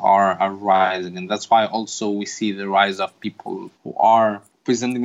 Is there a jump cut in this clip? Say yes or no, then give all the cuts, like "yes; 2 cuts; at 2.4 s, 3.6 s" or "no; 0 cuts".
yes; 1 cut; at 3.7 s